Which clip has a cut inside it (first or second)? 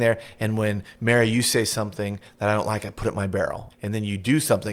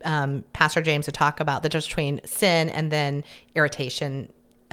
first